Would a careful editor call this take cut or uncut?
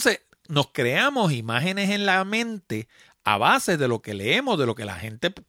uncut